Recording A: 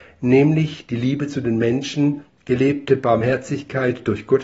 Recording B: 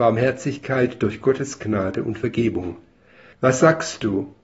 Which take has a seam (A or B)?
B